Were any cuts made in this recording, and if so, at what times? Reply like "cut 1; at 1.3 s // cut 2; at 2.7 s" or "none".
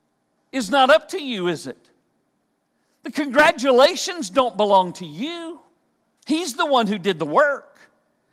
cut 1; at 6.2 s